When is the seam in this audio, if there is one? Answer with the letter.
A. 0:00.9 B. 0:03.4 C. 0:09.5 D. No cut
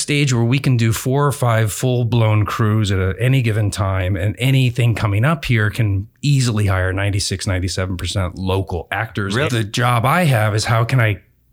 C